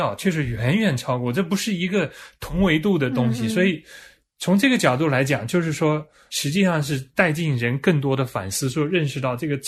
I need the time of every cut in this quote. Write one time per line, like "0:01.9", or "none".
0:06.3